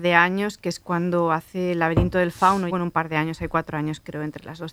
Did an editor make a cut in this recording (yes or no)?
yes